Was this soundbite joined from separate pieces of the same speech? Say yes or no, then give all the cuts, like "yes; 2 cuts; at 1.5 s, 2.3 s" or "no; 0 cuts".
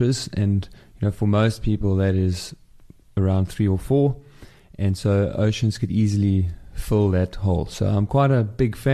no; 0 cuts